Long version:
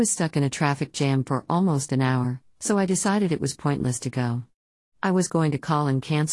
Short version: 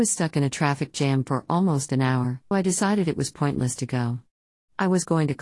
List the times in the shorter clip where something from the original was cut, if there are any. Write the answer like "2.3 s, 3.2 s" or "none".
2.5 s